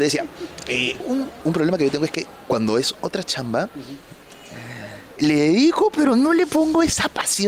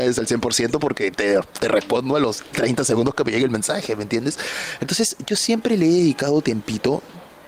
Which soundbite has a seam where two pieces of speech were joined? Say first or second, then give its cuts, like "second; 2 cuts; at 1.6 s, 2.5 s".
first; 2 cuts; at 1.0 s, 5.2 s